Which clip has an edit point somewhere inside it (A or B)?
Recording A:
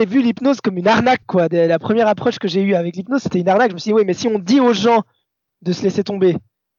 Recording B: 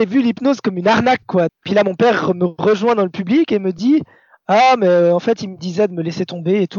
B